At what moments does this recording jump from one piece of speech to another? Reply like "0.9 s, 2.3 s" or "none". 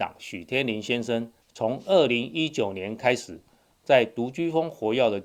1.4 s